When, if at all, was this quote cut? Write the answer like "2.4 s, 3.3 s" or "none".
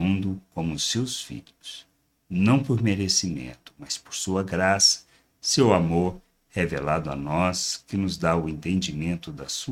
none